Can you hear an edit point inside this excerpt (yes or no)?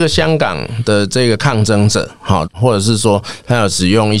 yes